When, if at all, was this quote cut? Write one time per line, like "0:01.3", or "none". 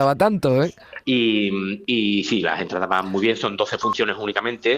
0:01.0